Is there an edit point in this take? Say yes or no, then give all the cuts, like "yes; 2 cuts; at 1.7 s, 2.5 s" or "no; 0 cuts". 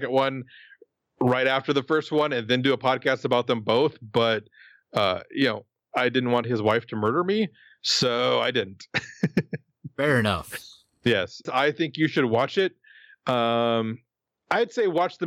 yes; 1 cut; at 11.5 s